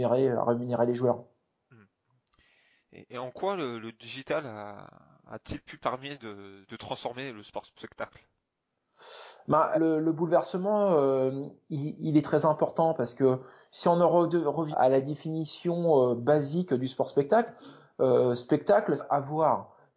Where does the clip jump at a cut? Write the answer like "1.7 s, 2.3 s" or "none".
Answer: 9.7 s, 14.7 s, 19.0 s